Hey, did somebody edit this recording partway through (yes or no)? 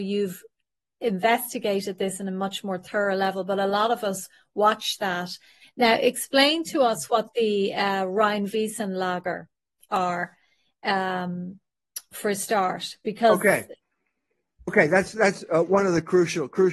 yes